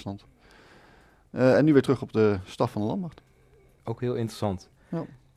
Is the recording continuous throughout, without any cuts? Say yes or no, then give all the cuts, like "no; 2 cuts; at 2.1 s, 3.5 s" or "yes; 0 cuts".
no; 1 cut; at 3.8 s